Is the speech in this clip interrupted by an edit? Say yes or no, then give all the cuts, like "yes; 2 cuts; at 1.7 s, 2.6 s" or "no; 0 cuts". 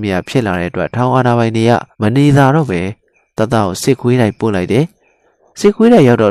yes; 1 cut; at 1.9 s